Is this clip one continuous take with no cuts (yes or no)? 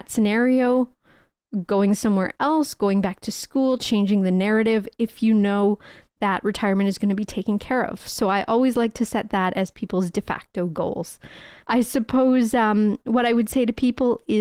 no